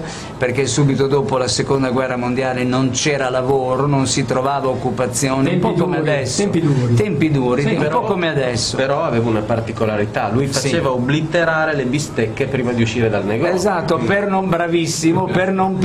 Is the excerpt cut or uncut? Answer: uncut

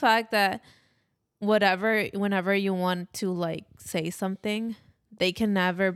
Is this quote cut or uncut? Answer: uncut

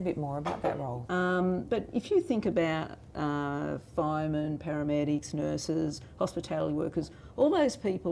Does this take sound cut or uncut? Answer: cut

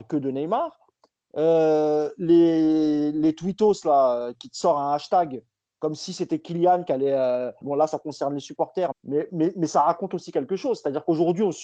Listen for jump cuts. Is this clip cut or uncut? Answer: cut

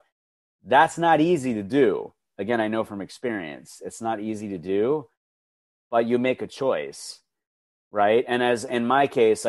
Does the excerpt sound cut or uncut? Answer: uncut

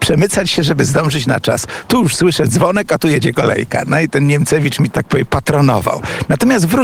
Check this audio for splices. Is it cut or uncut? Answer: cut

